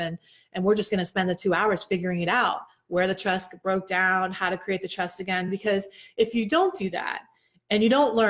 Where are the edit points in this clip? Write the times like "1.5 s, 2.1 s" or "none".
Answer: none